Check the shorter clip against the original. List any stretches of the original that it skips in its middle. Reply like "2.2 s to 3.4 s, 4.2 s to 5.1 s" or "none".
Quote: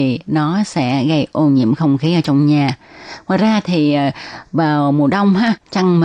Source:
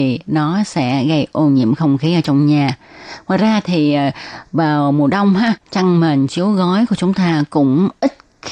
none